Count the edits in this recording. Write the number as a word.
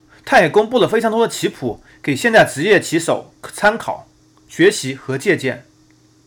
zero